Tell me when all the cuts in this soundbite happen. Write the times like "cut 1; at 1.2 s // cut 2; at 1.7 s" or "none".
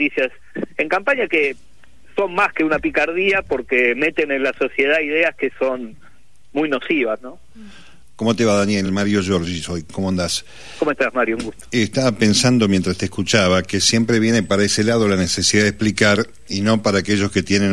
none